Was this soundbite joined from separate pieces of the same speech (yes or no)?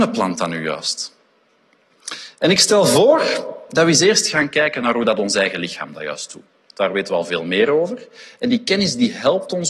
no